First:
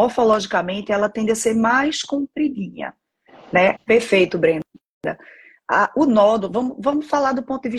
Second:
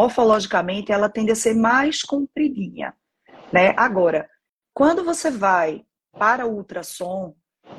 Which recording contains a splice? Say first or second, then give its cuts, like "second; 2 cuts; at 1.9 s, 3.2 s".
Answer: first; 1 cut; at 3.8 s